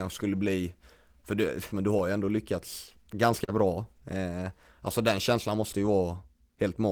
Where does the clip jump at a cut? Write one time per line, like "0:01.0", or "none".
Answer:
0:01.7
0:03.0